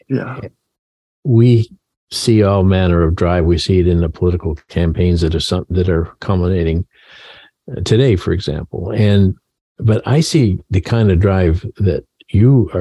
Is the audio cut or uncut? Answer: uncut